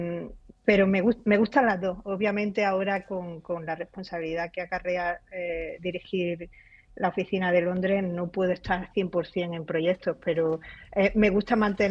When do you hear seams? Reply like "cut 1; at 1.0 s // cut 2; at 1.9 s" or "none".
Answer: none